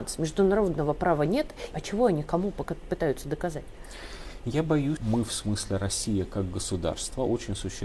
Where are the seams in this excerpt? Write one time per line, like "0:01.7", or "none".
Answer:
0:01.7
0:05.0